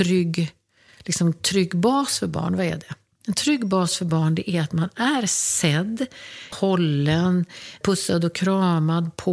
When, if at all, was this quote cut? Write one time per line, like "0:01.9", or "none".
0:06.5
0:07.8